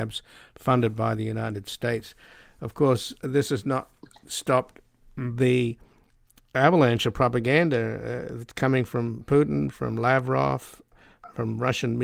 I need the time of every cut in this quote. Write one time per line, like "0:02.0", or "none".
none